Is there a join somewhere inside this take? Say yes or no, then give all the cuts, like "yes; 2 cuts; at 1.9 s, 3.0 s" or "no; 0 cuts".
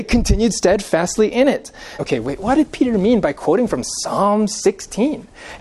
yes; 1 cut; at 2.0 s